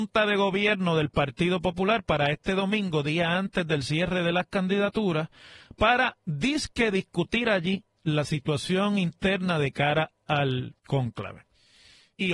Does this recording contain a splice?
yes; 1 cut; at 10.8 s

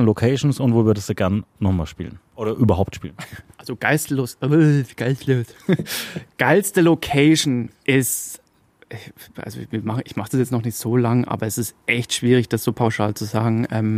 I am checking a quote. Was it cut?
no; 0 cuts

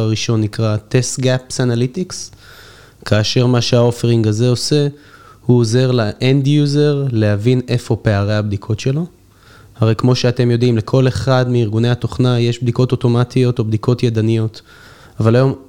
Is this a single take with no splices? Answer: yes; 0 cuts

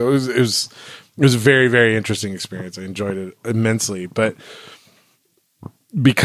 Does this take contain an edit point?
no; 0 cuts

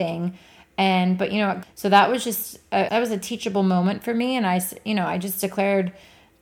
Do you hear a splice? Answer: yes; 2 cuts; at 1.6 s, 2.9 s

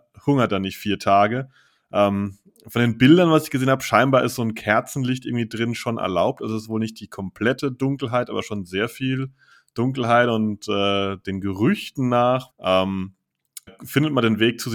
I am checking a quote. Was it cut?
yes; 2 cuts; at 12.5 s, 13.7 s

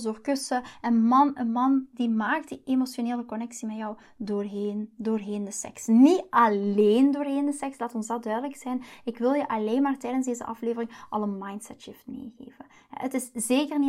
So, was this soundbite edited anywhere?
no; 0 cuts

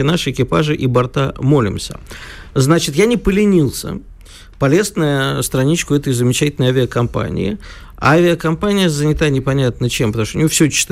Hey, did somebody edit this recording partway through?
no; 0 cuts

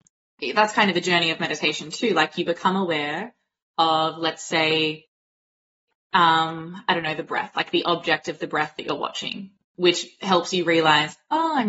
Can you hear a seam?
no; 0 cuts

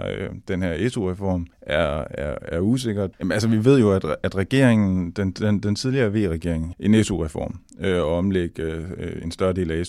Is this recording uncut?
no; 3 cuts; at 1.5 s, 3.1 s, 6.7 s

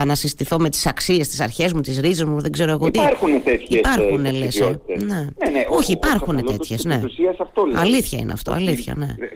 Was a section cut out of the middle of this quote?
no; 0 cuts

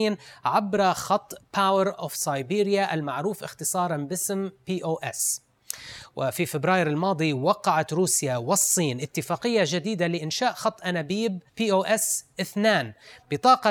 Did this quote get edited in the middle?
yes; 1 cut; at 11.5 s

